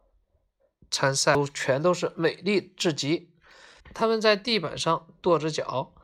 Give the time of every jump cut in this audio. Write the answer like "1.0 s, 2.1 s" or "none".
3.8 s